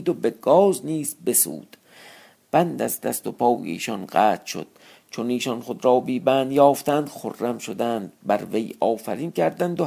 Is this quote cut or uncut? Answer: uncut